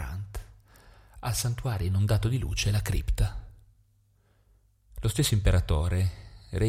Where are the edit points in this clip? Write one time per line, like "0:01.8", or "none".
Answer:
0:04.9